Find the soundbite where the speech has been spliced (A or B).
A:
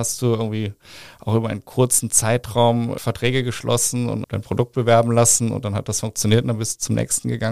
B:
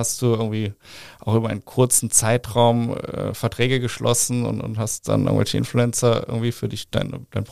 A